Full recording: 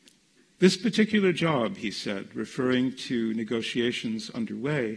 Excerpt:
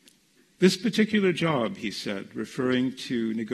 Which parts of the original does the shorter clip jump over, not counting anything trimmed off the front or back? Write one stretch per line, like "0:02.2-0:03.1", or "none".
none